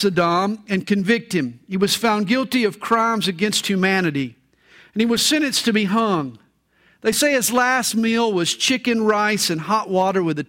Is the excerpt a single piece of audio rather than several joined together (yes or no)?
yes